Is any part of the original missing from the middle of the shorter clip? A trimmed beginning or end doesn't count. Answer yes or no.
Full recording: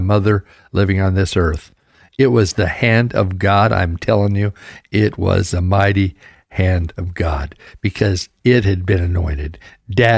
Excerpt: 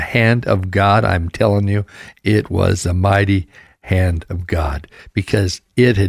no